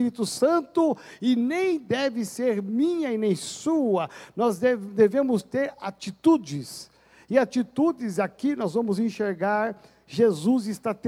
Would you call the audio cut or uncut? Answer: uncut